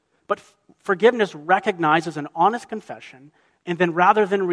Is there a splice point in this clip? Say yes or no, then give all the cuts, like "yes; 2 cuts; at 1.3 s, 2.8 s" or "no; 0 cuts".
yes; 1 cut; at 3.6 s